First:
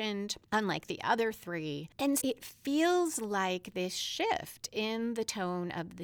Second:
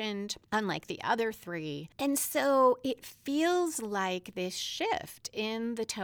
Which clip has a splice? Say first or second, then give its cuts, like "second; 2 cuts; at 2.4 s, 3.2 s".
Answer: first; 1 cut; at 2.2 s